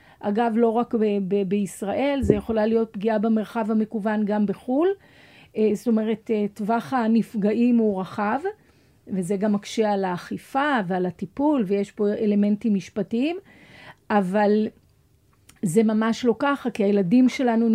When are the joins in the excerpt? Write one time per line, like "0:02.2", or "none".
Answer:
none